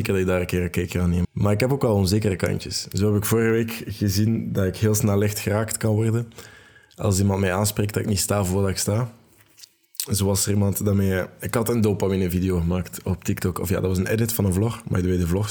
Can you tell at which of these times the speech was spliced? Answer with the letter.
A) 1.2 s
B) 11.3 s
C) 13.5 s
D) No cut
A